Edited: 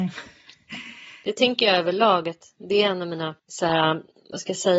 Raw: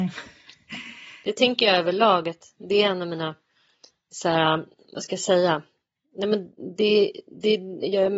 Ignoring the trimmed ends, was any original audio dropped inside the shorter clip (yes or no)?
yes